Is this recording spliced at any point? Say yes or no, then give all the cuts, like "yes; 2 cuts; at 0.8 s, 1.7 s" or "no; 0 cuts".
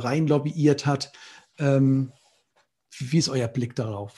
no; 0 cuts